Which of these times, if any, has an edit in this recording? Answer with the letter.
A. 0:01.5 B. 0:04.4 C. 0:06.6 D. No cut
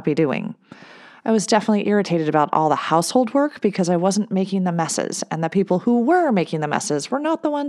D